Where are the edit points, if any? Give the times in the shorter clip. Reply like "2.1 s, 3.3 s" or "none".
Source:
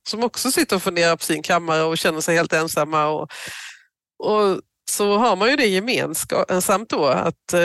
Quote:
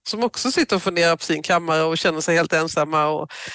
none